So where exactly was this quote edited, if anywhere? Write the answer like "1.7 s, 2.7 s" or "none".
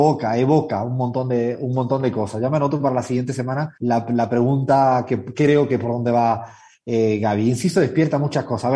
3.8 s